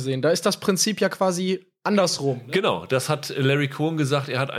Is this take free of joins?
yes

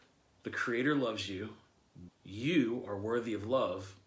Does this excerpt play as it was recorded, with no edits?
no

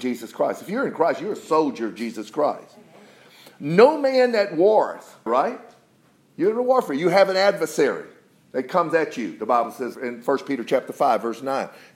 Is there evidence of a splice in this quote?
yes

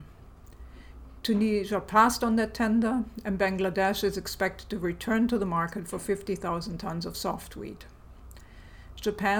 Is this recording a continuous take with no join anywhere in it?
yes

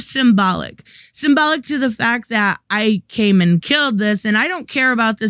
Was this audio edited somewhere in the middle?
no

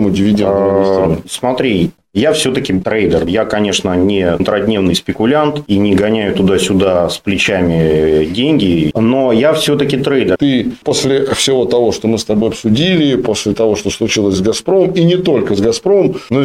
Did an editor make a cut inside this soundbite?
yes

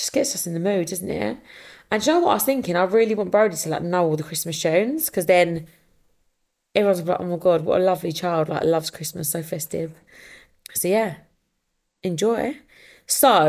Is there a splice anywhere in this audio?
no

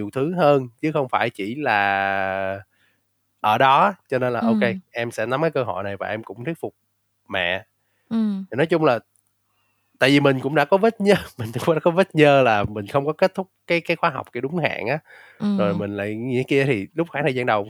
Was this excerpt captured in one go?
yes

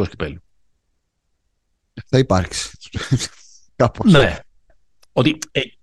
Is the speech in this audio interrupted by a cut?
no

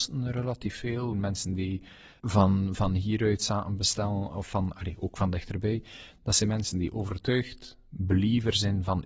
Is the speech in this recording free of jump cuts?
no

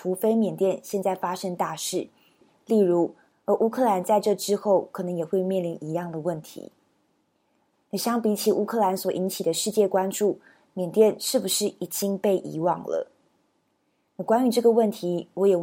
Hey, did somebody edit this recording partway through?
yes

